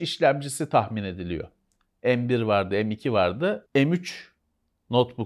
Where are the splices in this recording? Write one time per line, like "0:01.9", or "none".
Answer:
0:03.7